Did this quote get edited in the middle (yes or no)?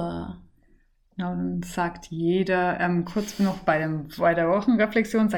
no